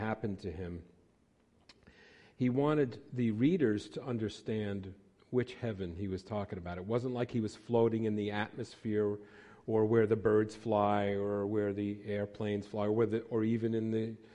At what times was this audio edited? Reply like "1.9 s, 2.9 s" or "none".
none